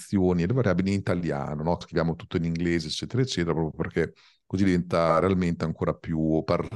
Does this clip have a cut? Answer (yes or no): yes